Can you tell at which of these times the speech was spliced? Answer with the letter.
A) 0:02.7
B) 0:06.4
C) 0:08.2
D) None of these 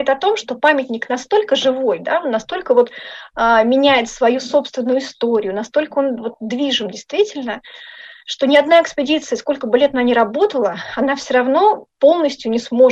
D